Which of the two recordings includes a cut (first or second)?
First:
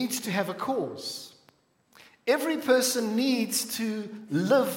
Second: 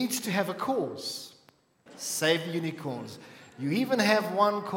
second